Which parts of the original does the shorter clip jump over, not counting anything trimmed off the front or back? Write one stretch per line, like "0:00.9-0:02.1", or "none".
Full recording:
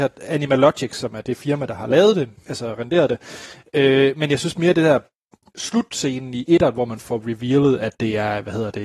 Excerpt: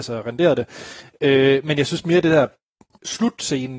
none